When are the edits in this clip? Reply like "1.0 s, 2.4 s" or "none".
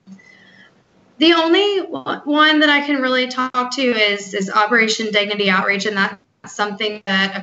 none

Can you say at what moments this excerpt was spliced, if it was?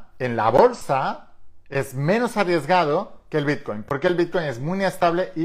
none

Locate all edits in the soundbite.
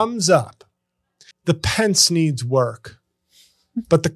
1.3 s

